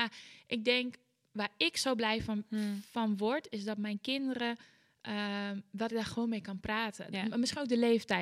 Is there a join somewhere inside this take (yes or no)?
no